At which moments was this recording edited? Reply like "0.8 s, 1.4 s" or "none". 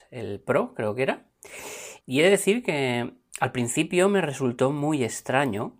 2.0 s